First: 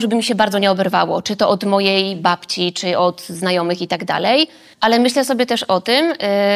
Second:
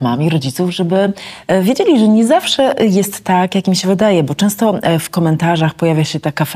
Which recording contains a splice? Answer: first; 1 cut; at 4.7 s

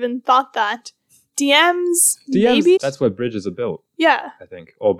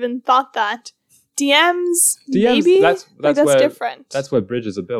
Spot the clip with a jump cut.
first; 1 cut; at 2.8 s

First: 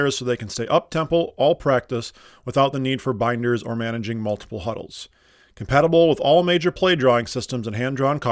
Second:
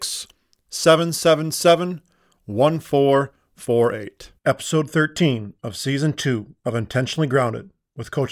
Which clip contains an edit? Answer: second; 1 cut; at 4.4 s

